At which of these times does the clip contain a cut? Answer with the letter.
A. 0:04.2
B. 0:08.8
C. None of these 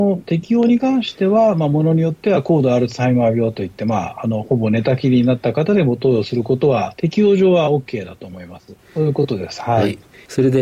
B